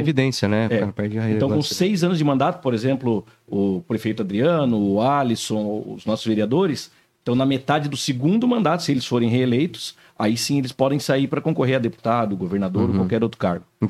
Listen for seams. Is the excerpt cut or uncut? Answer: uncut